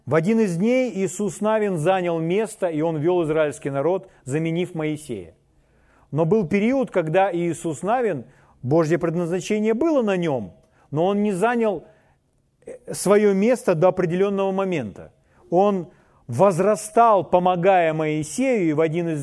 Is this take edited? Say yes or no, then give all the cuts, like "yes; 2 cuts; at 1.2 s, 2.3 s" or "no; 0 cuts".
yes; 1 cut; at 15.4 s